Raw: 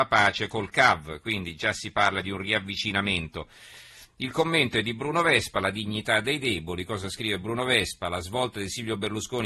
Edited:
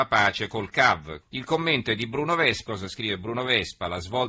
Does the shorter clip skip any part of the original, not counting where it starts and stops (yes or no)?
yes